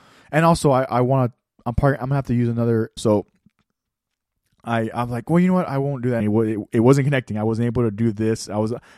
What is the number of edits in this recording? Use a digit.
2